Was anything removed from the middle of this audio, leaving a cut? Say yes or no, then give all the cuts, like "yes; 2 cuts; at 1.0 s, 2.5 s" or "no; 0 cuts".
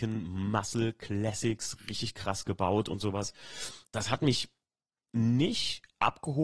yes; 1 cut; at 3.9 s